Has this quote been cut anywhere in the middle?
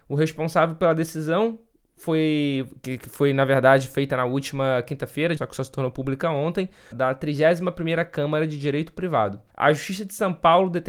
yes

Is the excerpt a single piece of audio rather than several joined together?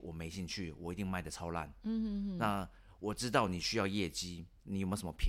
yes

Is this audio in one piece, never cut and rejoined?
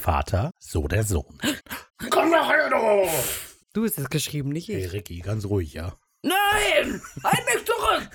no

